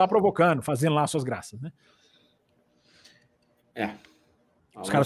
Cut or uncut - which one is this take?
uncut